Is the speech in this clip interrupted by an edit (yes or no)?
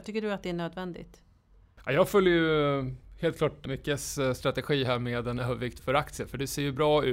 yes